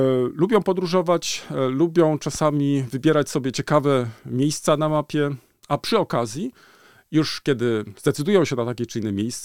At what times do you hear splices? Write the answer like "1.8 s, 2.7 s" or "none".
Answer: none